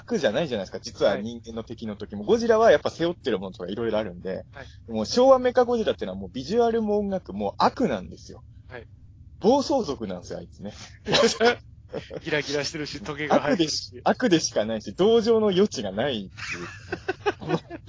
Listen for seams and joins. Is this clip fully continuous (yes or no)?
yes